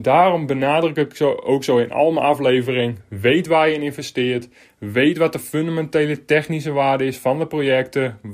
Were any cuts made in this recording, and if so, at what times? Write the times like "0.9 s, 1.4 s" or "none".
none